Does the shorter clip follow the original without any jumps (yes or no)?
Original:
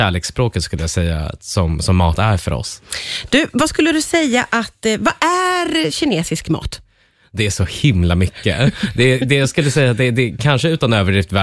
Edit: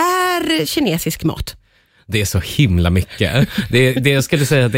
yes